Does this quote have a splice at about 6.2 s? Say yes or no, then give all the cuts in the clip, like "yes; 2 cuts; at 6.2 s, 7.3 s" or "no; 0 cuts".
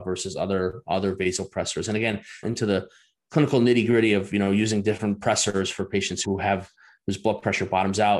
yes; 2 cuts; at 2.4 s, 6.2 s